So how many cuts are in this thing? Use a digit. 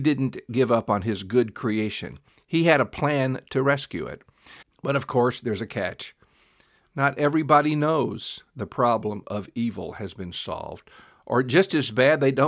1